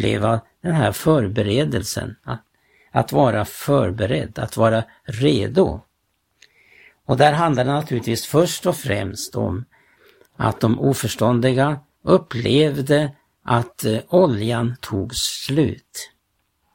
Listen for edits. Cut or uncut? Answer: uncut